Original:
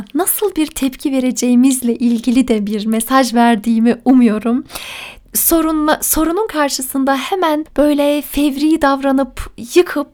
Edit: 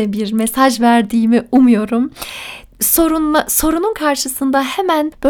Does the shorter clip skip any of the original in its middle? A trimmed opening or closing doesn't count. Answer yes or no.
no